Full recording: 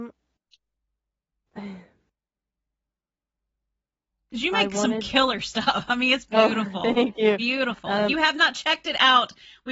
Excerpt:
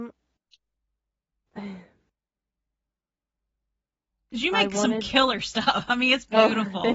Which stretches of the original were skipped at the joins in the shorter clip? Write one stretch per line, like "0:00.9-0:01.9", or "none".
none